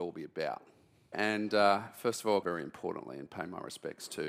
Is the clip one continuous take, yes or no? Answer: no